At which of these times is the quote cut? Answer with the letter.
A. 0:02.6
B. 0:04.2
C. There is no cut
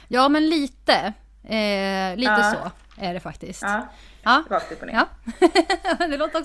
B